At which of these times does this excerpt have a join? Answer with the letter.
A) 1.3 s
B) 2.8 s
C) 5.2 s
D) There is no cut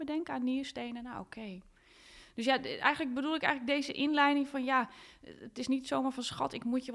D